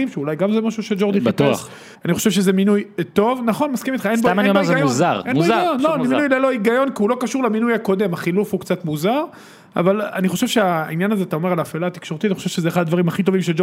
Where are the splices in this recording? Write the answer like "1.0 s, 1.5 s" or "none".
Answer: 2.0 s